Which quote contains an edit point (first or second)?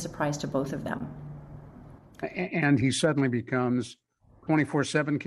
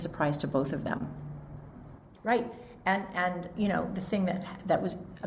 second